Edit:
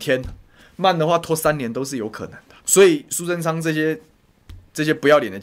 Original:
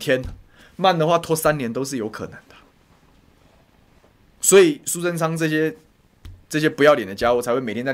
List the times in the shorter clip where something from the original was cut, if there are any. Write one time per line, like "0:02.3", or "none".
0:02.6